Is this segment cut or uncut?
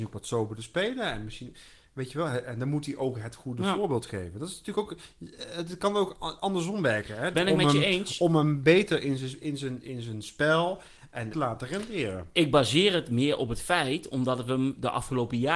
cut